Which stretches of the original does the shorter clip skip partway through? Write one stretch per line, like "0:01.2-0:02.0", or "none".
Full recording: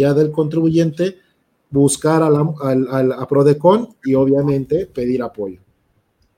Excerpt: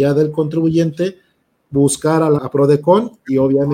0:02.4-0:03.2